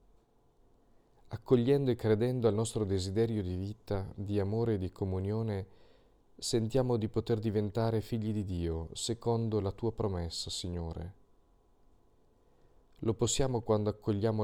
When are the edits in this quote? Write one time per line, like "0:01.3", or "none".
none